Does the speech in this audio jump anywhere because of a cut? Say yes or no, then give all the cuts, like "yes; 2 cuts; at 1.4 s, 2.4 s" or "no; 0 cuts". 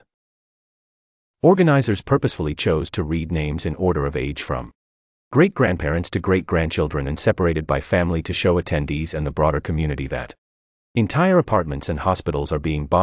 no; 0 cuts